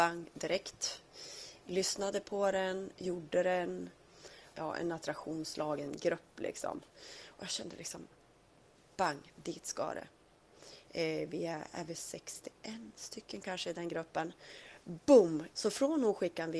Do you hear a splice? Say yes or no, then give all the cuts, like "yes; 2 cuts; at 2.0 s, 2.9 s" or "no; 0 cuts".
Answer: yes; 2 cuts; at 4.5 s, 15.5 s